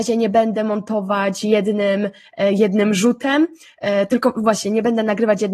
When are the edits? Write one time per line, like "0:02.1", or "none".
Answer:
none